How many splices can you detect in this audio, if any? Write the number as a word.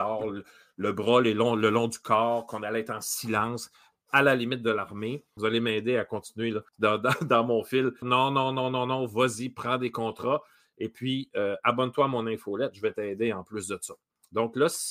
three